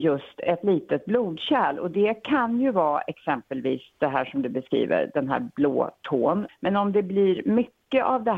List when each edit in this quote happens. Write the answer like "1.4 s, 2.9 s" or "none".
6.5 s